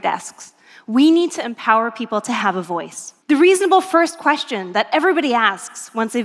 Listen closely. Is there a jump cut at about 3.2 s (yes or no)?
yes